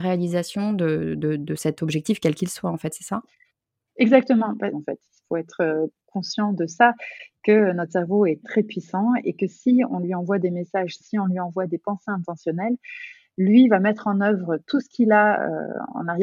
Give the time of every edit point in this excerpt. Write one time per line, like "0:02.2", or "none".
0:04.7
0:08.4
0:11.0